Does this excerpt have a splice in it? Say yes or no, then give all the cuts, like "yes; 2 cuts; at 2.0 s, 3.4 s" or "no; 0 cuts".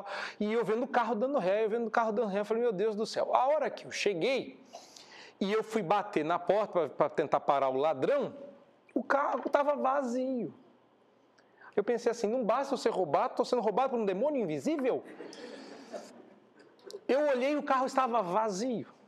yes; 1 cut; at 11.7 s